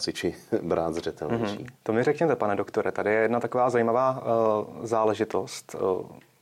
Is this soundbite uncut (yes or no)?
no